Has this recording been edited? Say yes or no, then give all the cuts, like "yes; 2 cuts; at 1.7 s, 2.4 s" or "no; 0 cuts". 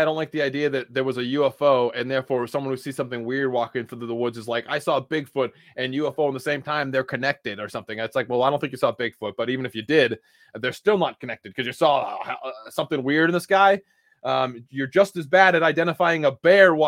no; 0 cuts